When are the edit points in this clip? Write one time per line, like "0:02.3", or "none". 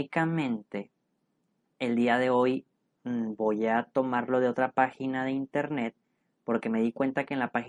none